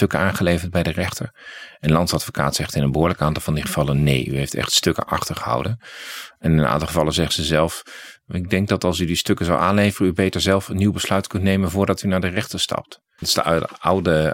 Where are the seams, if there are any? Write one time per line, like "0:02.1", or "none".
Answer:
0:13.2